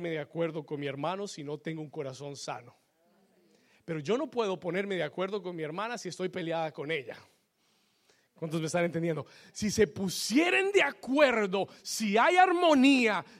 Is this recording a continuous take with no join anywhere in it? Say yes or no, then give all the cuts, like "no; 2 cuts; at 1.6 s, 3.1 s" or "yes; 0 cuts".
yes; 0 cuts